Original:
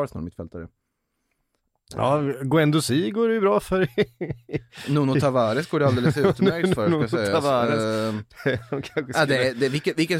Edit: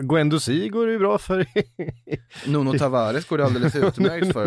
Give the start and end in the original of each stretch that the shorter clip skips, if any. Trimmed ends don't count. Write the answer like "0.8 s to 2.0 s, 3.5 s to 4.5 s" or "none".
none